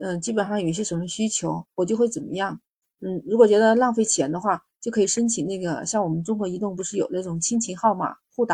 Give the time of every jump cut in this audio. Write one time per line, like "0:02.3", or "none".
0:02.8